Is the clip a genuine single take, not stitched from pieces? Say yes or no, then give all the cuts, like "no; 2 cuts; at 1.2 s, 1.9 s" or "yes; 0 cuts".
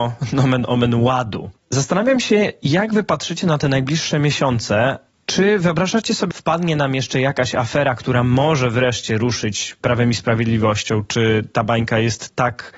no; 1 cut; at 6.3 s